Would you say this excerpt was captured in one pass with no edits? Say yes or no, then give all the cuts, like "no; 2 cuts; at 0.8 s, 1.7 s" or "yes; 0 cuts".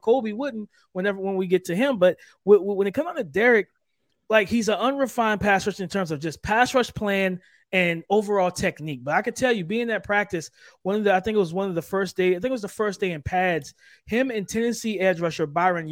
yes; 0 cuts